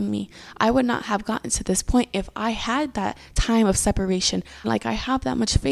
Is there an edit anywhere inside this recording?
yes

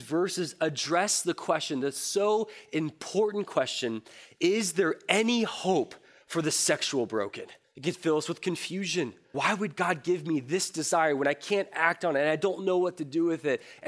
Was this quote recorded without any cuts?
no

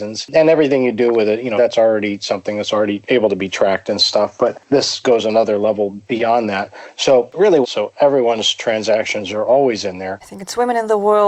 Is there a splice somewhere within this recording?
yes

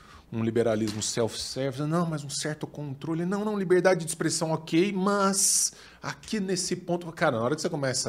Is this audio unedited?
yes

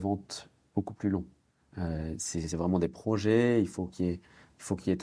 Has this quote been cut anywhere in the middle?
yes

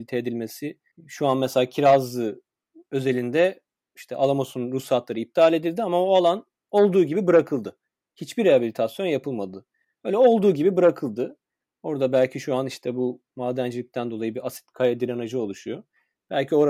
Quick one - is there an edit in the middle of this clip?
no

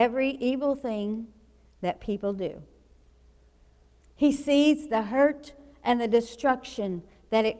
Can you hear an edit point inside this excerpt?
yes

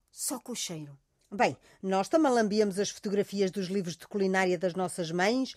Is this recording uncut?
yes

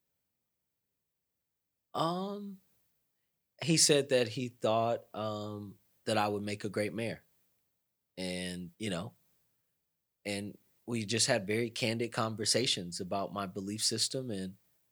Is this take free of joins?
no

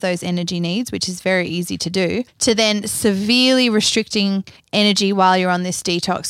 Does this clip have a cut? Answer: no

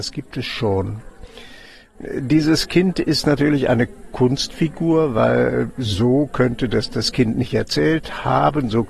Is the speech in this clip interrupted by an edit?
no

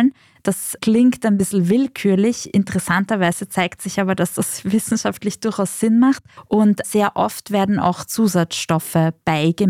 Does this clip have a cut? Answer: no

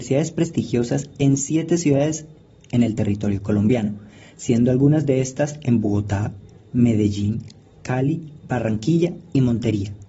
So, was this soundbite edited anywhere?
no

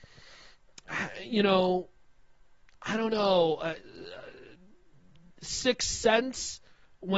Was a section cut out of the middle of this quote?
no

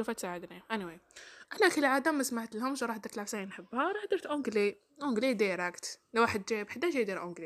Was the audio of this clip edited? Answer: yes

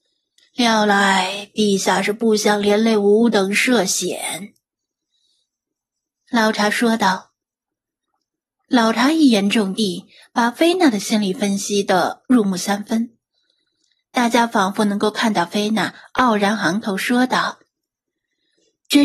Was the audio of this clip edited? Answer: no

